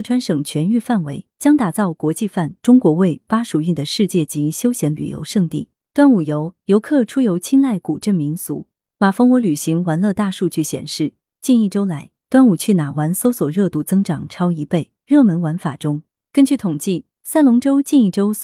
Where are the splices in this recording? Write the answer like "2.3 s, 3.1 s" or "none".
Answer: 1.3 s, 16.2 s

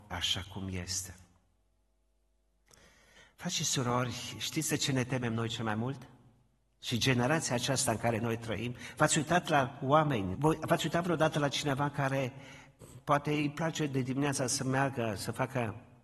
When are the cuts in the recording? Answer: 10.3 s

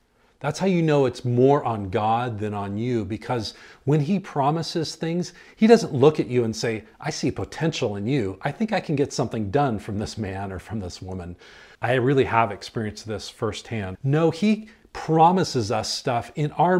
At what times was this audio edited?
11.7 s, 13.9 s

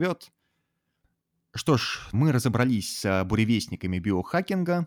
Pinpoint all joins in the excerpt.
2.1 s

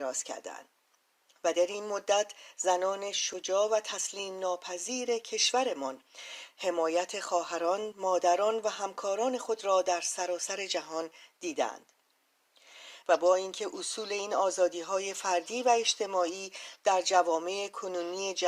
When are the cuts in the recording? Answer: 7.9 s, 13.0 s

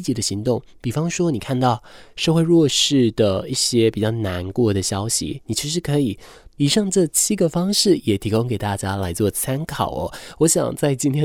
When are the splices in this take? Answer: 6.6 s

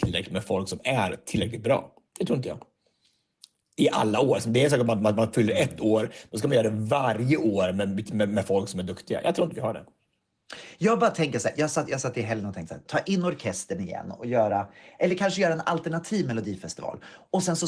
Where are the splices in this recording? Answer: 12.9 s

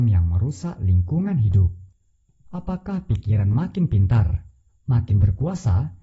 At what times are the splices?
4.7 s

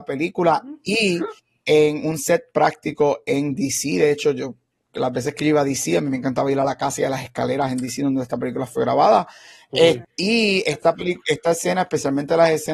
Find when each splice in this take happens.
10.0 s

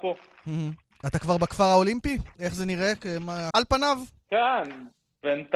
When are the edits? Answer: 2.4 s, 3.5 s

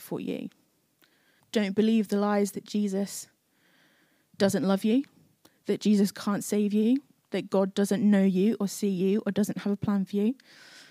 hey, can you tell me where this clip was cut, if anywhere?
1.4 s

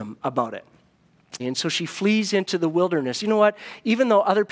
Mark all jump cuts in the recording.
1.4 s, 3.2 s

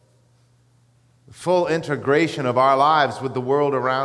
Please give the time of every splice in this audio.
none

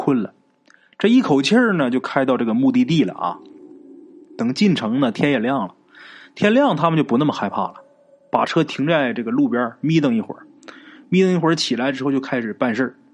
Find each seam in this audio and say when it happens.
none

